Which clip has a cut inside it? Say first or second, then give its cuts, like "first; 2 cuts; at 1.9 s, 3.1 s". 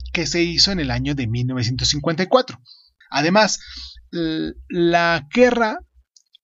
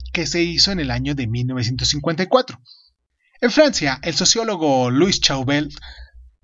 first; 1 cut; at 3.0 s